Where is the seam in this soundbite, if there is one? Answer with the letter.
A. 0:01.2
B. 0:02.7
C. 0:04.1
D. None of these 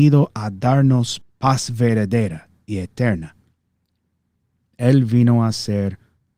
A